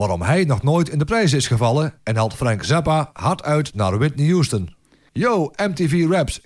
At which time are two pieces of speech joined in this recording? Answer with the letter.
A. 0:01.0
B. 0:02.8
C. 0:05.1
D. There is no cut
C